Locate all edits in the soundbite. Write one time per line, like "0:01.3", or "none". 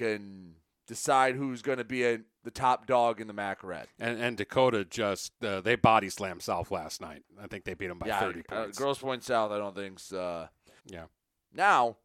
0:10.8